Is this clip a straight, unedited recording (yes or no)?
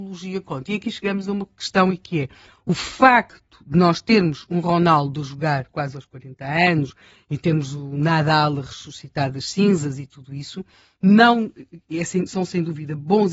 yes